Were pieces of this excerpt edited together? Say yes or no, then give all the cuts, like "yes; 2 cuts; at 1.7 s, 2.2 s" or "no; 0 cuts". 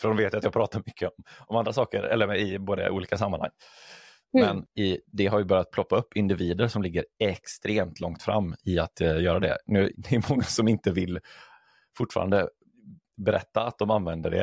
yes; 2 cuts; at 4.2 s, 9.9 s